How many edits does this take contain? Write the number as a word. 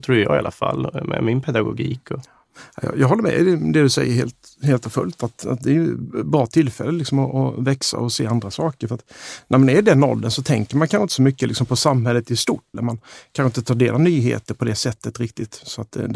one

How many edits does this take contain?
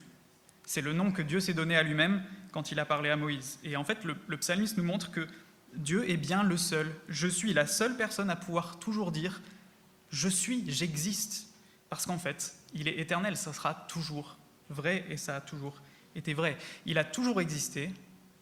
zero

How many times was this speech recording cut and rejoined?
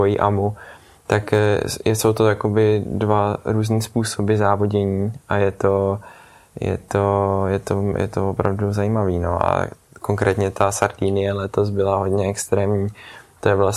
zero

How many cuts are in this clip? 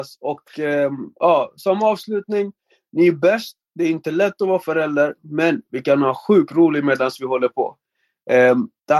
zero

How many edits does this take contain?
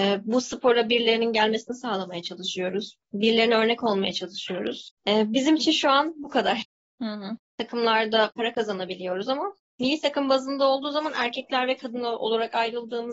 two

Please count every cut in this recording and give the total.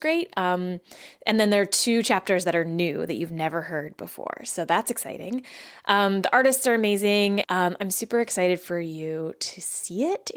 one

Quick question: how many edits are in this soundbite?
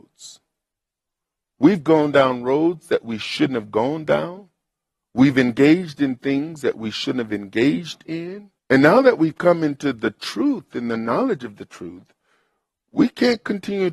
one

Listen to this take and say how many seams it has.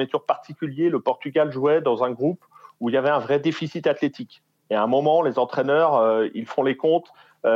zero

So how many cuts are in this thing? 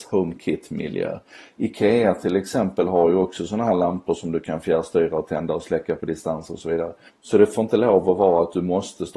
one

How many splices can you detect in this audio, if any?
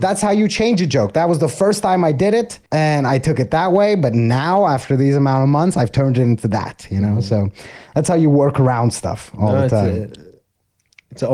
one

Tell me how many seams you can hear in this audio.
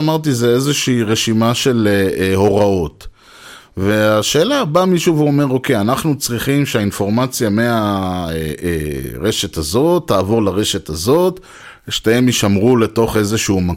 zero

